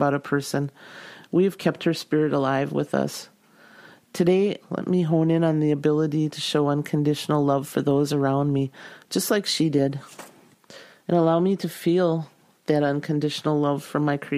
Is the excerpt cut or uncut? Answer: cut